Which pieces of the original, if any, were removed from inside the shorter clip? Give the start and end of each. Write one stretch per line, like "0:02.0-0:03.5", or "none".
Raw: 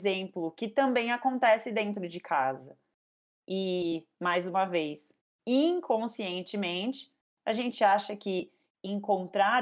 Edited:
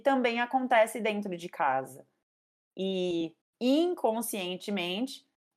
0:04.1-0:05.3